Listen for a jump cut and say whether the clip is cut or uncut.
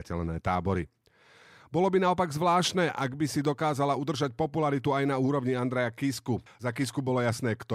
cut